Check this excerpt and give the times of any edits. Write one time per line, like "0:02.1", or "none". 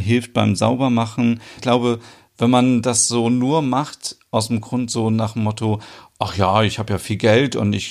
0:01.6